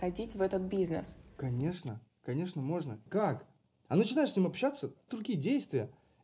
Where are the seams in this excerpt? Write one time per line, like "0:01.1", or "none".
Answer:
0:03.1
0:05.1